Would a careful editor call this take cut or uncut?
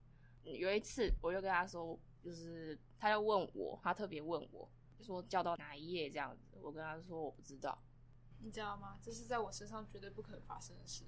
uncut